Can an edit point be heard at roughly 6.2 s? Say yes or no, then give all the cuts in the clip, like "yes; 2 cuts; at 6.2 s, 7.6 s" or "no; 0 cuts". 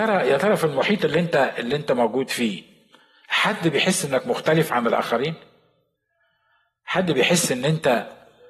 no; 0 cuts